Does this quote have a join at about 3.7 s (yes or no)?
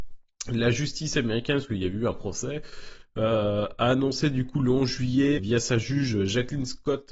no